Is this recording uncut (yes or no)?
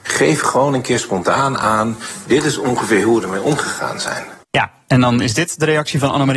no